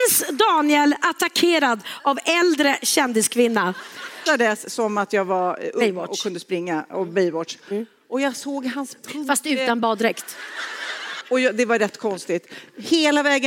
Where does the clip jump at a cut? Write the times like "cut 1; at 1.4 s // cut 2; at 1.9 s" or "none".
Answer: cut 1; at 4.3 s // cut 2; at 11.2 s